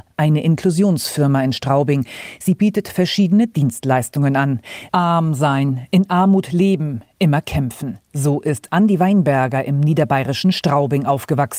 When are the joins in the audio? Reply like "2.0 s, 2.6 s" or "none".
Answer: 4.9 s